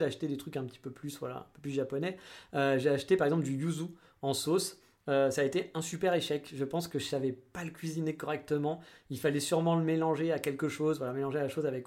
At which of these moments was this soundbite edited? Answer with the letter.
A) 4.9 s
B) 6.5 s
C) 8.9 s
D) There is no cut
D